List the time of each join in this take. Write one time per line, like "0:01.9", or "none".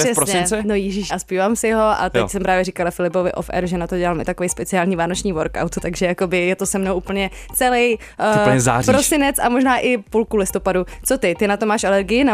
0:01.1